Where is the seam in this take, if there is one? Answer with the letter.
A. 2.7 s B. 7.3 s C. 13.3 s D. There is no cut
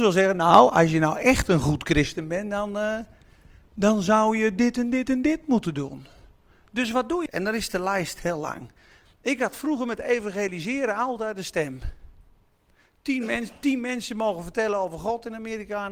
B